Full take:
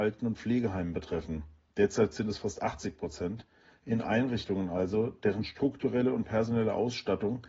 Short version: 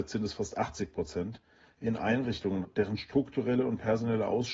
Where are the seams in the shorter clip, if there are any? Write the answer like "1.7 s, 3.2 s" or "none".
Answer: 2.6 s